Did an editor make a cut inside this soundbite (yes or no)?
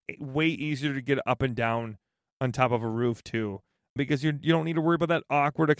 no